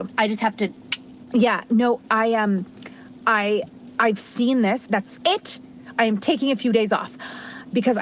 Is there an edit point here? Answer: yes; 1 cut; at 4.9 s

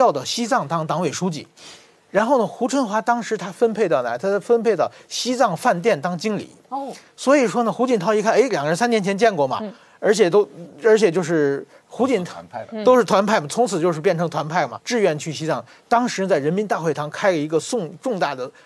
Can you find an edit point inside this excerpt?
yes; 1 cut; at 14.8 s

